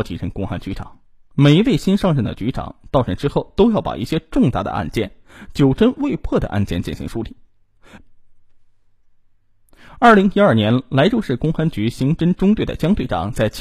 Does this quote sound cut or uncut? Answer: cut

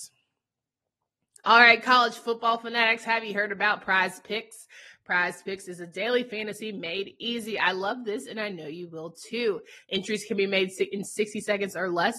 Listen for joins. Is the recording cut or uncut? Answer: cut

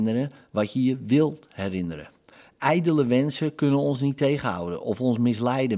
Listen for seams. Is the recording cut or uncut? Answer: uncut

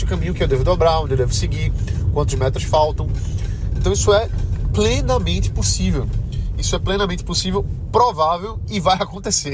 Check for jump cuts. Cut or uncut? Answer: uncut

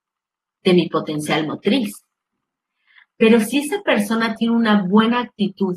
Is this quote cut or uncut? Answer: cut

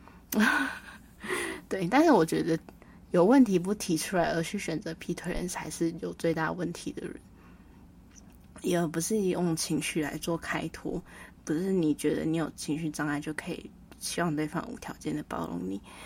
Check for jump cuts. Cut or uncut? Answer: uncut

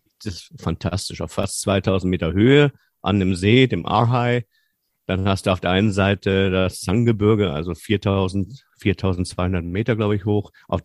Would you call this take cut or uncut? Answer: uncut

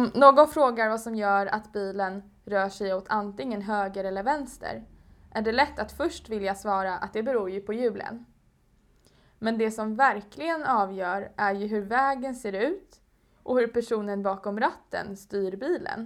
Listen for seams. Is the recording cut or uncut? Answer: uncut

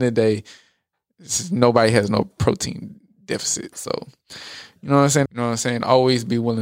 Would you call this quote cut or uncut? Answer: cut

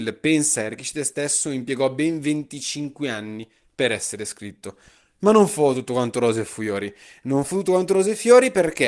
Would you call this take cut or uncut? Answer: uncut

